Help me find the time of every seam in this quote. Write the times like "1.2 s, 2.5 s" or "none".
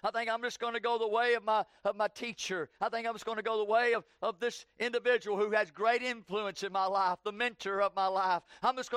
none